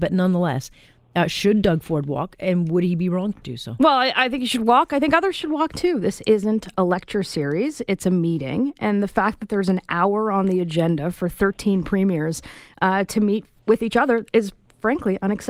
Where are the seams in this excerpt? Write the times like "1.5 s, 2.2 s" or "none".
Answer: none

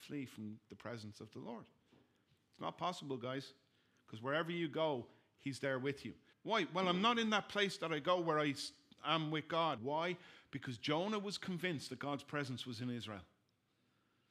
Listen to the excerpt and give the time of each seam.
6.3 s, 9.8 s

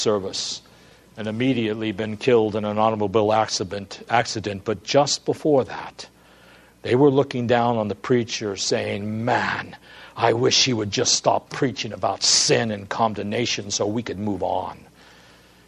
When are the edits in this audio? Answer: none

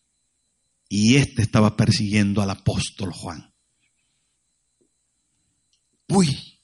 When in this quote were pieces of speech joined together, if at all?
none

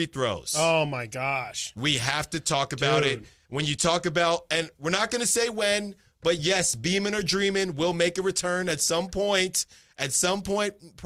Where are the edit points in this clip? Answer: none

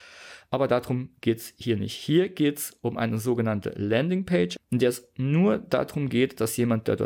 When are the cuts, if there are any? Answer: 4.6 s

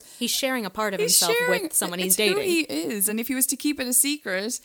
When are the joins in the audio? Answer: none

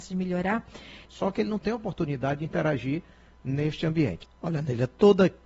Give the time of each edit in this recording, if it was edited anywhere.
1.0 s, 4.2 s

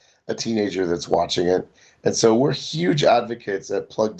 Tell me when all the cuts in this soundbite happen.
none

